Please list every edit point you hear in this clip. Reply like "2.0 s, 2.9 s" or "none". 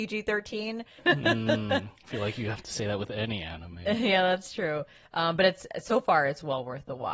1.0 s